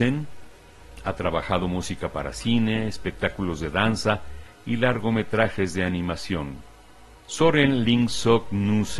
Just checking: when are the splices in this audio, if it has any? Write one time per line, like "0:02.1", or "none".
none